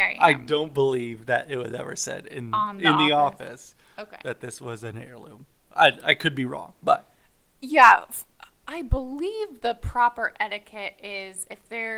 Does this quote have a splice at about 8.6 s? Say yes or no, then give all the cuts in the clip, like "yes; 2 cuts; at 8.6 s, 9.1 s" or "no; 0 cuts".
yes; 1 cut; at 8.6 s